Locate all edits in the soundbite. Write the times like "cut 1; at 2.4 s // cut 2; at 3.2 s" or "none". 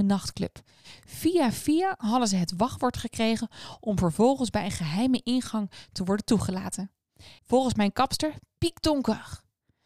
cut 1; at 7.4 s